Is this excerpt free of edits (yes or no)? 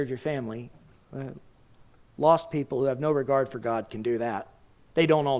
yes